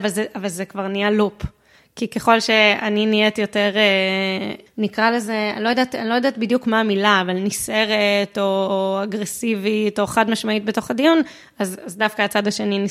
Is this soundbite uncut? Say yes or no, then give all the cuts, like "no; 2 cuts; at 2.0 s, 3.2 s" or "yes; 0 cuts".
yes; 0 cuts